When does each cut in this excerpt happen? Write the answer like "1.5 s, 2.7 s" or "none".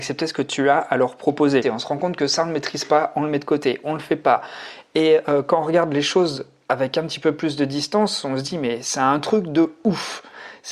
1.6 s